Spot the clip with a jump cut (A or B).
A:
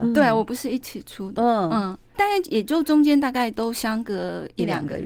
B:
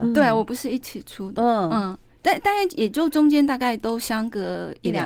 A